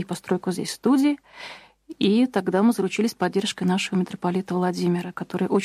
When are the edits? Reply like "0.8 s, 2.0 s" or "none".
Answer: none

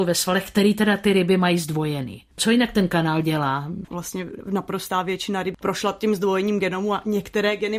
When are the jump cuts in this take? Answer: 3.9 s

